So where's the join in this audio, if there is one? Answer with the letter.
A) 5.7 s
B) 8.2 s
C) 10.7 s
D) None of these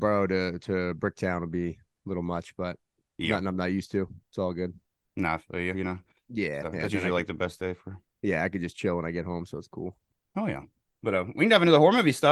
A